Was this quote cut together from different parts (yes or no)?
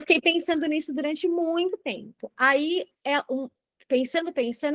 no